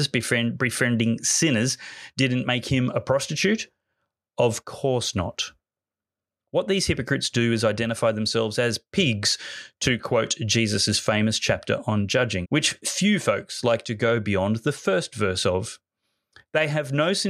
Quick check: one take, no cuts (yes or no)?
no